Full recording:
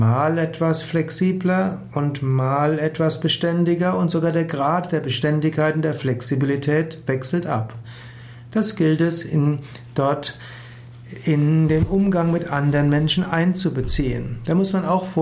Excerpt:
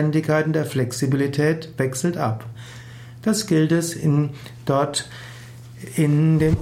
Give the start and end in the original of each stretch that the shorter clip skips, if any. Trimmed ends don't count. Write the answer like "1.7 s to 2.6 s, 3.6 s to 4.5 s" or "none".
none